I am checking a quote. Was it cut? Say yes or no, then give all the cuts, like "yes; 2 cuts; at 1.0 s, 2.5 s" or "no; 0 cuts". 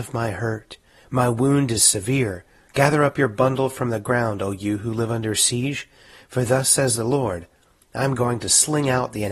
yes; 1 cut; at 2.7 s